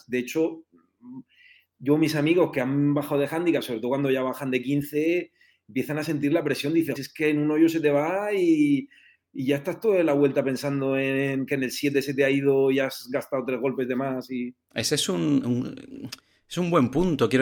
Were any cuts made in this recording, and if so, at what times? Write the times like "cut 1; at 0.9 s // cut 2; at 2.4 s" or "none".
cut 1; at 7.0 s // cut 2; at 15.4 s